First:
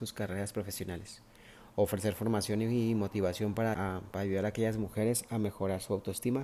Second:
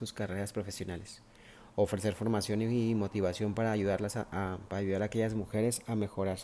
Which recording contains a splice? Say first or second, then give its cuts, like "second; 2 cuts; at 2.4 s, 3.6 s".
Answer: first; 1 cut; at 3.7 s